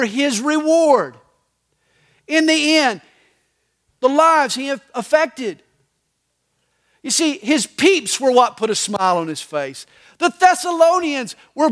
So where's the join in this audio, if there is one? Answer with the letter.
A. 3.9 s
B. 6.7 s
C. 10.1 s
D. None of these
A